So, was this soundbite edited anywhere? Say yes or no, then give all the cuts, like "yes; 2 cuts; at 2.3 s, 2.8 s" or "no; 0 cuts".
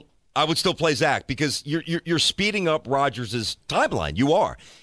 no; 0 cuts